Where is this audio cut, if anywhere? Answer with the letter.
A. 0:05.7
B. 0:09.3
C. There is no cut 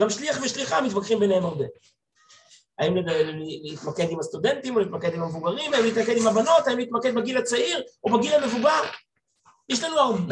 A